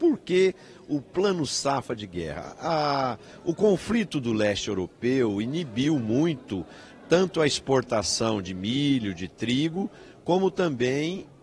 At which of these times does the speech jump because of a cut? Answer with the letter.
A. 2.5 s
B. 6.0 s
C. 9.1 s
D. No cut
D